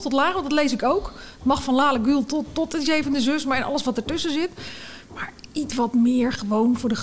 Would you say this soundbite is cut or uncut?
uncut